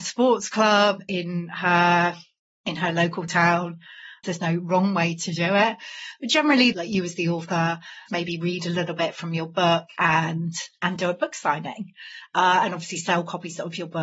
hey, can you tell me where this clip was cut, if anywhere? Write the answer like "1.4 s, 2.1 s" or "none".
4.2 s, 6.7 s, 8.1 s